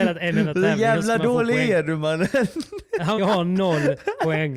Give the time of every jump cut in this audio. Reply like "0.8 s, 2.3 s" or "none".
3.2 s